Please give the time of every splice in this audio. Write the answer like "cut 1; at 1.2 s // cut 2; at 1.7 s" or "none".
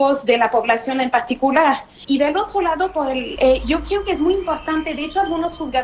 cut 1; at 2.0 s // cut 2; at 3.4 s